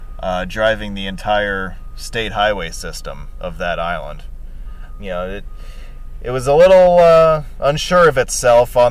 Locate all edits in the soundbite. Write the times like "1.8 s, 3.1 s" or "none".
5.0 s